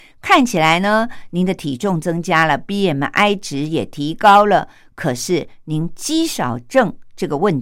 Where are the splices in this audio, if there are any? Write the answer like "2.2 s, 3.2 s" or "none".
none